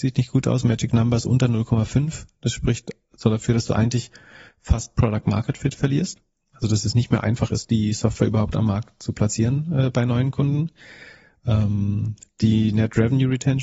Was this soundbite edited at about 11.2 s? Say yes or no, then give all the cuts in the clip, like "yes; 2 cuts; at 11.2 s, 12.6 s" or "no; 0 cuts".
no; 0 cuts